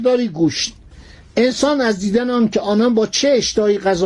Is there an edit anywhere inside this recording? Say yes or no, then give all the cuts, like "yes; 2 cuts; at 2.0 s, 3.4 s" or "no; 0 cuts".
no; 0 cuts